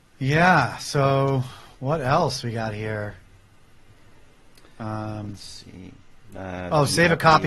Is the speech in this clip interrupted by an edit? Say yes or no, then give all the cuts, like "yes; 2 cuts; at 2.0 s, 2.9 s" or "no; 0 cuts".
no; 0 cuts